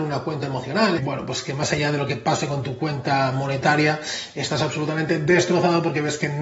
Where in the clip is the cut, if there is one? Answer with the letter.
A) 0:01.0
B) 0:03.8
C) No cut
A